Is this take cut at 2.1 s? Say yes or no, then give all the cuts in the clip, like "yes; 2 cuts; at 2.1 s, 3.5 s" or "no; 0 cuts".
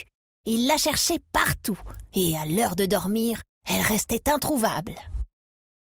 no; 0 cuts